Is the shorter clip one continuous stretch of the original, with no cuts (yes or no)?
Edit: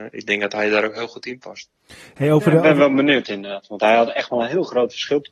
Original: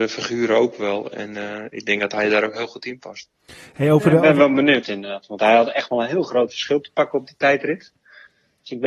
yes